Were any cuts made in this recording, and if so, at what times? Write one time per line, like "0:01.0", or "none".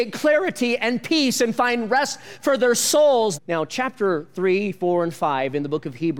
0:03.4